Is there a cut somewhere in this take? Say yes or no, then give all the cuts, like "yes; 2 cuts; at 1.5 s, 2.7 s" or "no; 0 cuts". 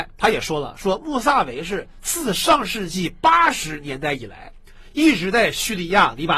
no; 0 cuts